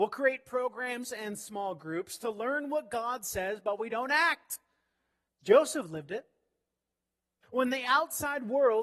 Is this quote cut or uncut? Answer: cut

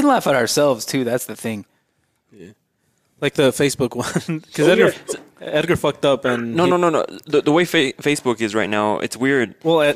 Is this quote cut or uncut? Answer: uncut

